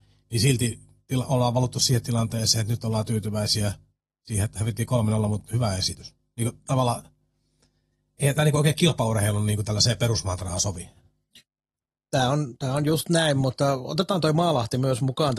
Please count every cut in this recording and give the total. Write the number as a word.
zero